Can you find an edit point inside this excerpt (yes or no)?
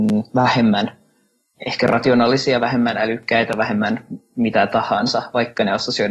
no